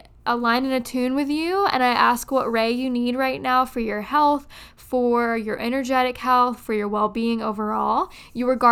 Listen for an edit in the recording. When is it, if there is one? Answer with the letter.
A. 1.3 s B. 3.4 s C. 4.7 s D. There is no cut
D